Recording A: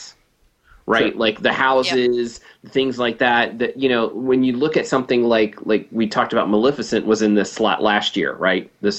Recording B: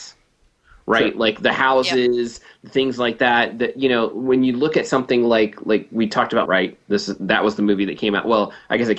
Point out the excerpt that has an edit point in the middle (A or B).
B